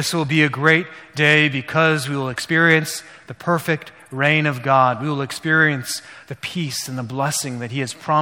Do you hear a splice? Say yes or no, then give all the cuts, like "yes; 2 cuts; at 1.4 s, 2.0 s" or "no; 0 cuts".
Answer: no; 0 cuts